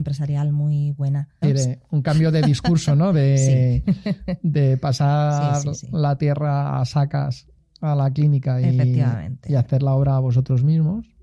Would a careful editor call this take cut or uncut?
cut